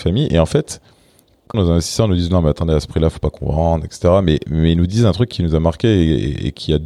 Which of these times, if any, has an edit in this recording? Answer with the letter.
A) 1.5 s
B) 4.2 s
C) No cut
A